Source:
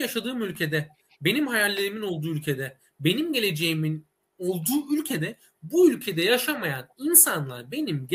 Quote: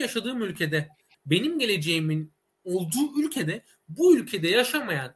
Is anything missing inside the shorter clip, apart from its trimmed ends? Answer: yes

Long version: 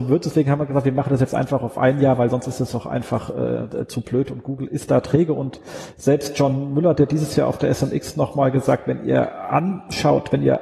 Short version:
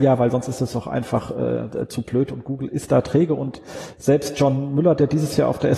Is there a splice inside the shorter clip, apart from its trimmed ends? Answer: no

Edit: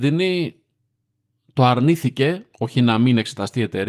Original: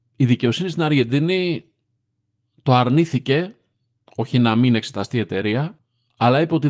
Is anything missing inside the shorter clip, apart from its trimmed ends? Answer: yes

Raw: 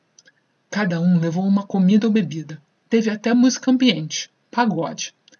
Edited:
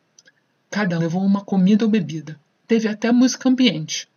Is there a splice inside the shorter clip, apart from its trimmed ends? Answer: yes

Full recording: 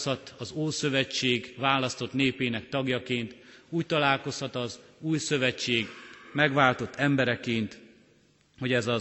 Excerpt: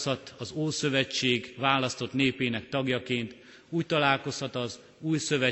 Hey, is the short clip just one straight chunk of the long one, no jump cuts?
yes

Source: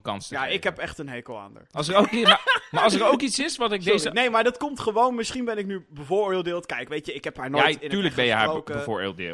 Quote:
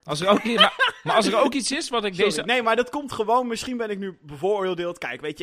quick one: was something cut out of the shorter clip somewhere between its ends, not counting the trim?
no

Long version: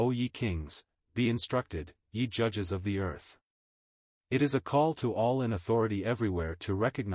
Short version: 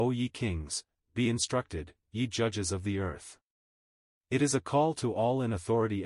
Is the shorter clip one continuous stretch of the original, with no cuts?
yes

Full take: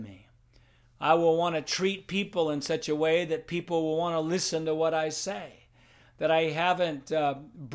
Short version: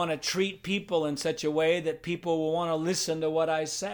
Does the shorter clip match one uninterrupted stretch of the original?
yes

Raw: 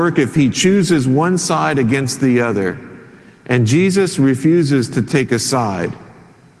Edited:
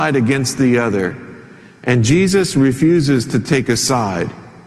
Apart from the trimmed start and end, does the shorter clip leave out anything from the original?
no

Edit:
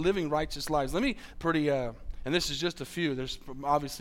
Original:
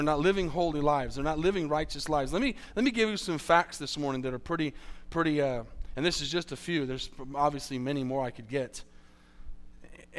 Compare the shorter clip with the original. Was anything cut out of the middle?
yes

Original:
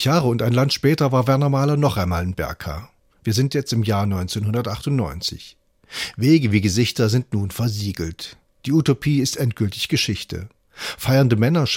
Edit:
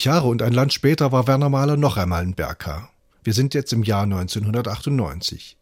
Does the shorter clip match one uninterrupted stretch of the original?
yes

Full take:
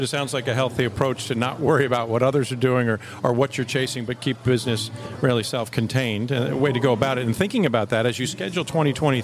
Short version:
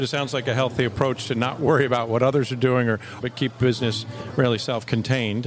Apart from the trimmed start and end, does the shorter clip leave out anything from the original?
yes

